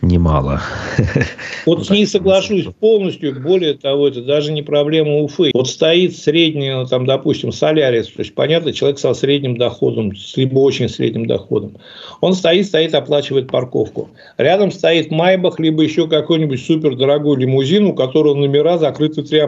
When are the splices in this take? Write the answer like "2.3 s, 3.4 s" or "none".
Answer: 5.5 s